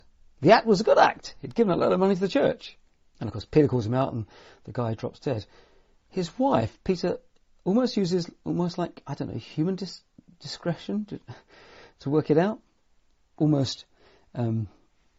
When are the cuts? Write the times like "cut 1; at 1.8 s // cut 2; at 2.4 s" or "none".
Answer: cut 1; at 3.0 s